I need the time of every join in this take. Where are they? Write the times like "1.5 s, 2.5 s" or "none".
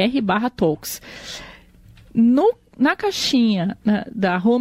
none